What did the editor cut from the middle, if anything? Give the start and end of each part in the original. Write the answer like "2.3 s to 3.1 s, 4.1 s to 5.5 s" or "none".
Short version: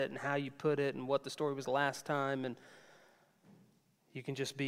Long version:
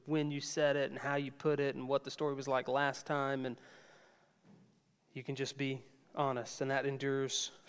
2.4 s to 2.6 s